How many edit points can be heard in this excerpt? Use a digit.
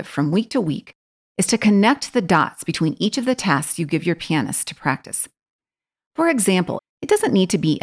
1